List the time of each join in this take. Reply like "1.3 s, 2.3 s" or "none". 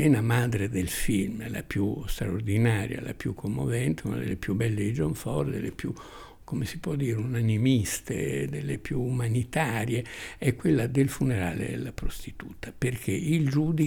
none